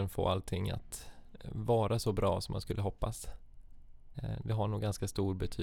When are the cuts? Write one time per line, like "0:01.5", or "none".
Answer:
0:01.4
0:04.1

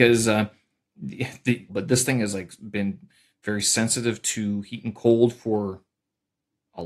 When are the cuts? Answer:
0:01.7

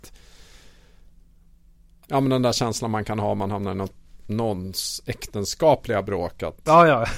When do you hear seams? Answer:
0:02.1

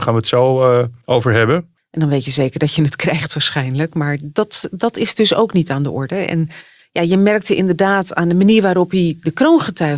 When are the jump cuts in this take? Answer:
0:01.8

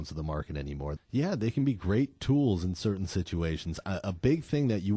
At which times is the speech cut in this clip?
0:01.0

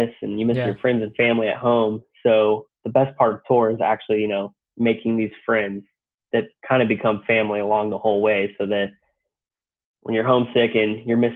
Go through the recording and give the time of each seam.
0:02.7

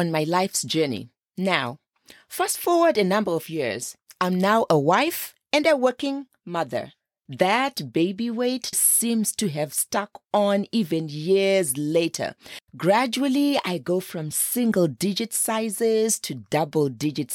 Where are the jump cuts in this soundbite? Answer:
0:07.3
0:08.7
0:12.7

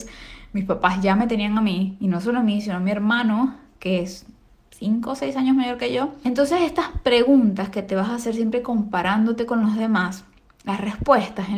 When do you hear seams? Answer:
none

